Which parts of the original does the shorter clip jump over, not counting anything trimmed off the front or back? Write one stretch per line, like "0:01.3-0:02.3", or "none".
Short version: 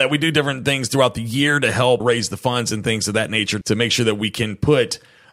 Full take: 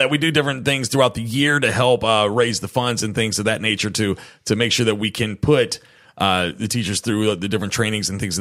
0:02.0-0:02.3
0:03.9-0:04.4